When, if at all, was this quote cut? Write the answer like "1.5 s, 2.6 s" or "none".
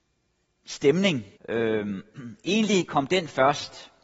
1.4 s